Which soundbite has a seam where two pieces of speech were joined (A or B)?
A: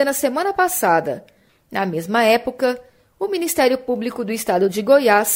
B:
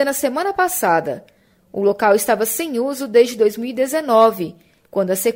A